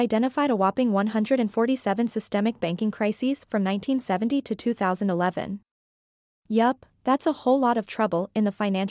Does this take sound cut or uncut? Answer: uncut